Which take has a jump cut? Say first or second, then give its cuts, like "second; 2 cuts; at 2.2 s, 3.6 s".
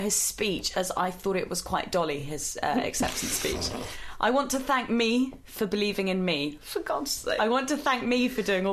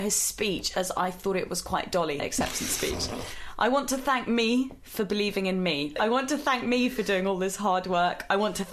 second; 2 cuts; at 2.2 s, 6.0 s